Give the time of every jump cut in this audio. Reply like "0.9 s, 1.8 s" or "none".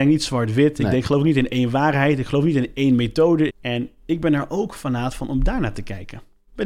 3.5 s